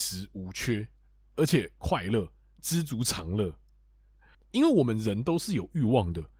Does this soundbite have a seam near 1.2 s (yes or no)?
no